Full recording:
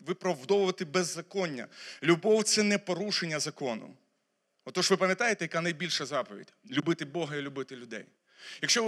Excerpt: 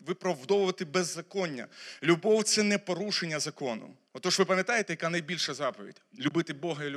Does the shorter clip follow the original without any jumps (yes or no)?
no